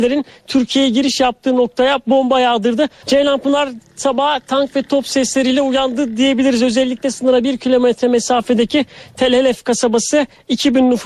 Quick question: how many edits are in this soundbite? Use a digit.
1